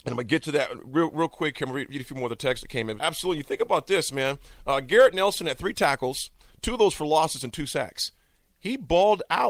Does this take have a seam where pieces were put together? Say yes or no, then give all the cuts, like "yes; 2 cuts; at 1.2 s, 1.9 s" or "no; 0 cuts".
yes; 1 cut; at 3.0 s